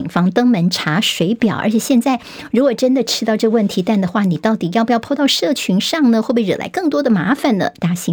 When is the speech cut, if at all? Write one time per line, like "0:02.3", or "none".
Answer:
none